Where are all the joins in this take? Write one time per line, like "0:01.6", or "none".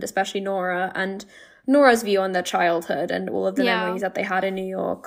none